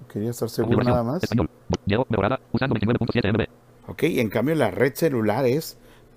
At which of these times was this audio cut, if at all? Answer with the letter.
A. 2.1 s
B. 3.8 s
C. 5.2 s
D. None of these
B